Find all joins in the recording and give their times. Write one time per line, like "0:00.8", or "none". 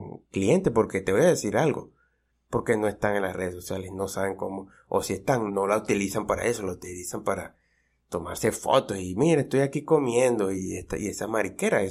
0:02.4
0:05.5